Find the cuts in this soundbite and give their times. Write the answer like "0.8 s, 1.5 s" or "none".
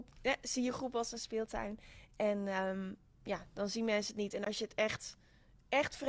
none

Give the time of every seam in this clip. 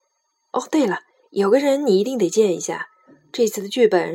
none

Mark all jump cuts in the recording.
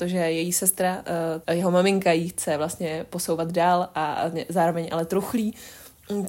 1.4 s

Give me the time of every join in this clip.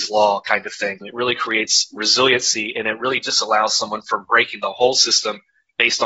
1.0 s

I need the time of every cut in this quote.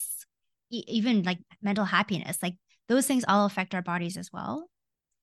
none

